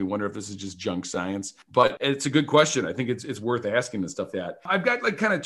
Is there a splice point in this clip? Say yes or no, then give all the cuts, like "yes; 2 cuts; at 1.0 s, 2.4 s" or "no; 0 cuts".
yes; 2 cuts; at 2.0 s, 4.3 s